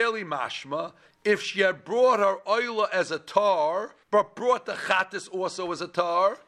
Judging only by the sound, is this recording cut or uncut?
cut